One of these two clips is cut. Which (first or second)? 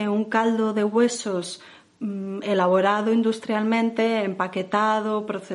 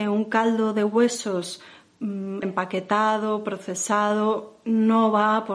second